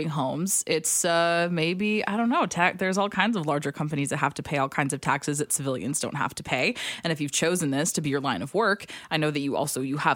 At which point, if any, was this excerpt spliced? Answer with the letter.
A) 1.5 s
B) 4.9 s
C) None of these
C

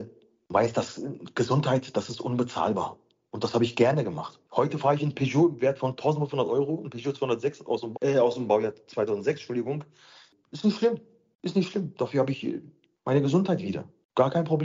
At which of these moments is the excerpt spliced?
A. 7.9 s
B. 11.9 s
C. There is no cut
A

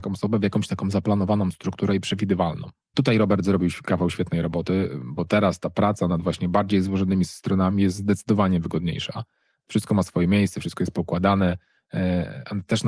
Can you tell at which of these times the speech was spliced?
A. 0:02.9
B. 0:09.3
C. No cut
A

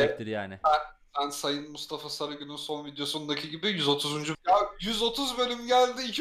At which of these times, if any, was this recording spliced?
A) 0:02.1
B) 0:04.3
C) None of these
B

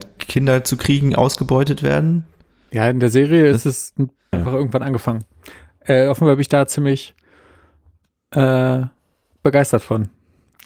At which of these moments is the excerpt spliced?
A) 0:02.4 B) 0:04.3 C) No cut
B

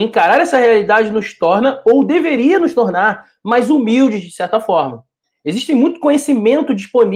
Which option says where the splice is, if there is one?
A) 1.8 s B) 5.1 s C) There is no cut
C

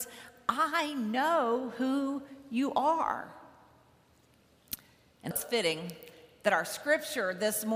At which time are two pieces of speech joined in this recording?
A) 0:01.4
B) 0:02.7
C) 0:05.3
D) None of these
C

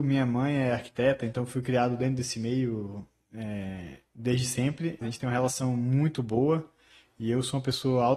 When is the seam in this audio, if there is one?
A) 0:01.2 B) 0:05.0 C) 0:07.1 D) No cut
B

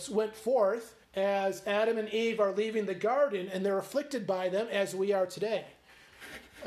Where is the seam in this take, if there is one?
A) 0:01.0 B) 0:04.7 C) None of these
A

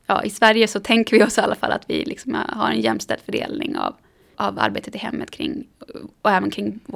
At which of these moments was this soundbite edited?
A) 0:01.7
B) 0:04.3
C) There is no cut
B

